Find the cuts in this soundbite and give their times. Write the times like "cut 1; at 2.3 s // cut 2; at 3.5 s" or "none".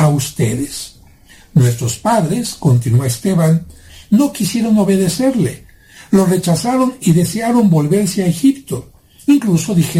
none

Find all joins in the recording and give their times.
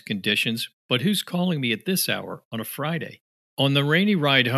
cut 1; at 3.5 s

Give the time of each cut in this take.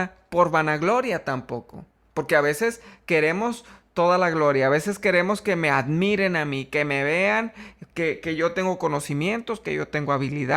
none

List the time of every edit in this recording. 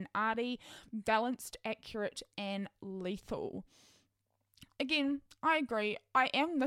none

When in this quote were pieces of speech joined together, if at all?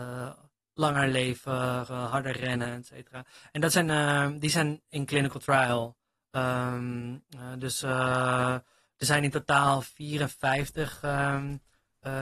cut 1; at 1.9 s

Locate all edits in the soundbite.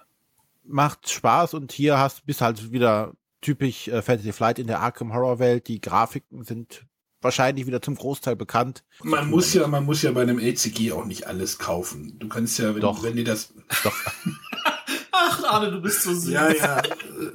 cut 1; at 9.0 s

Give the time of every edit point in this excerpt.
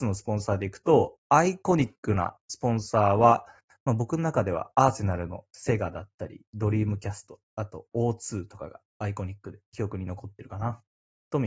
none

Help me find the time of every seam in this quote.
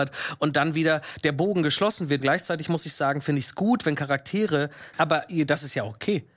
cut 1; at 2.2 s // cut 2; at 4.9 s

